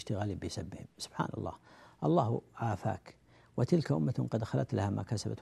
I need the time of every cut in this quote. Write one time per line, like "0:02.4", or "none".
none